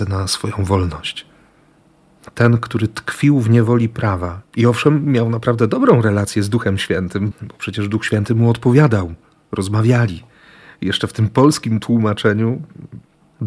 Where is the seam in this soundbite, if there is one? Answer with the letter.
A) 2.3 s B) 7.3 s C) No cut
B